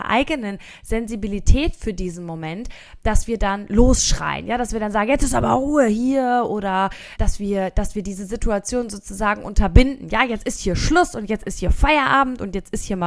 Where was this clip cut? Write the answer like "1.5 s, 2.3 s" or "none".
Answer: 7.2 s

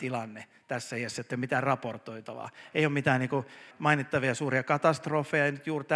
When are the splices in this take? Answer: 3.7 s

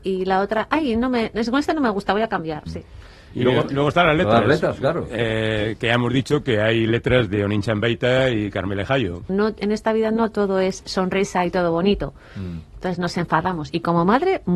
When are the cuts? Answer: 2.7 s, 9.3 s

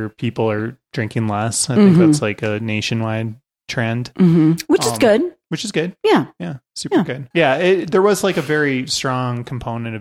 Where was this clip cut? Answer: none

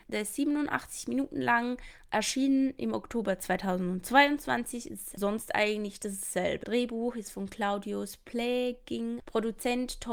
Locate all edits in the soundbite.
6.6 s, 9.2 s

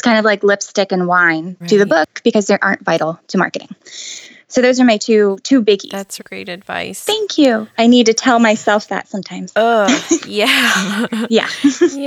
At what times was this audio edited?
1.6 s, 6.2 s, 7.8 s

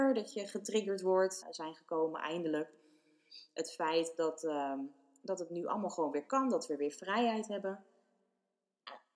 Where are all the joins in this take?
1.4 s

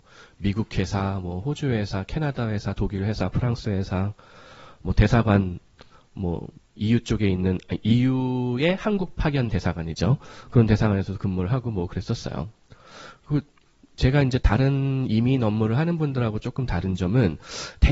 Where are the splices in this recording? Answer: none

